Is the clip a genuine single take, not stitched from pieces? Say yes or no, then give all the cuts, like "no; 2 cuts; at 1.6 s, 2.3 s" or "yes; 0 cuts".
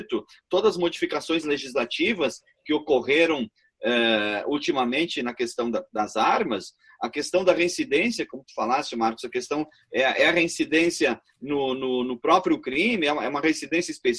yes; 0 cuts